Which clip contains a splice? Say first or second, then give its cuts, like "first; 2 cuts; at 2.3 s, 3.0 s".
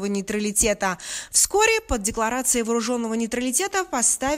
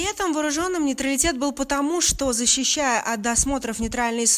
first; 1 cut; at 1.3 s